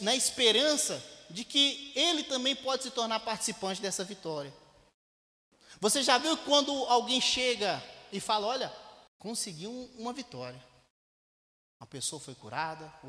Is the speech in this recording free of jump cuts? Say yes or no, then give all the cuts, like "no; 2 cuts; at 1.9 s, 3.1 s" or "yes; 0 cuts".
no; 1 cut; at 9.1 s